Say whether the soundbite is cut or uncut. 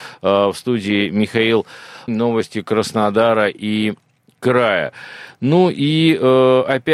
cut